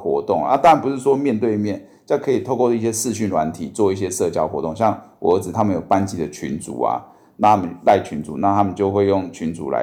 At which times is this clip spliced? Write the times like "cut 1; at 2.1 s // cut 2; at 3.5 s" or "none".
none